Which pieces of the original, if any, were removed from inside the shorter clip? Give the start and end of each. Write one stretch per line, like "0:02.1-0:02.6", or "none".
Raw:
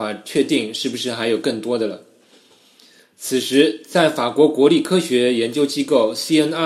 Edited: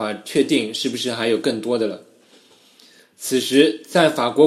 none